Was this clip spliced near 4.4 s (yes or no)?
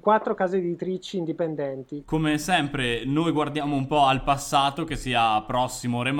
no